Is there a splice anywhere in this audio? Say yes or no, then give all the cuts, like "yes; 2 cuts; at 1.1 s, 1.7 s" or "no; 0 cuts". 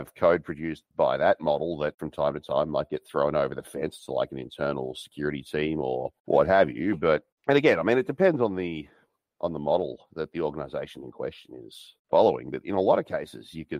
no; 0 cuts